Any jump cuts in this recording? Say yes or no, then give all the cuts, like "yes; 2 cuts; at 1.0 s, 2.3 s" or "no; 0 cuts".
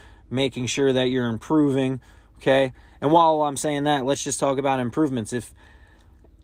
no; 0 cuts